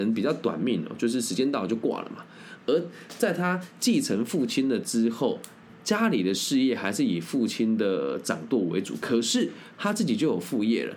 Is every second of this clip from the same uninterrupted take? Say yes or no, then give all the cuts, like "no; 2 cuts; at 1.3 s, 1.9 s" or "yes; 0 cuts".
no; 1 cut; at 2.6 s